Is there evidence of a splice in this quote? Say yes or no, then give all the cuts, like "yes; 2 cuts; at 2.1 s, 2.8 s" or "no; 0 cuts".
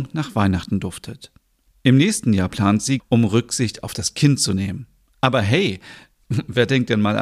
yes; 1 cut; at 3.0 s